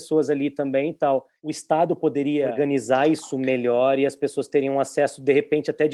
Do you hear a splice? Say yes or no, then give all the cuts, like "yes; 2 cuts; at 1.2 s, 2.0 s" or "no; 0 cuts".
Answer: no; 0 cuts